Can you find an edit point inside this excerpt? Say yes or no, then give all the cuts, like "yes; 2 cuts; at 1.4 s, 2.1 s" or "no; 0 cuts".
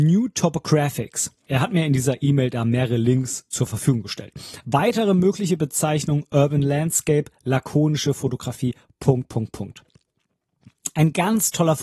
yes; 1 cut; at 1.5 s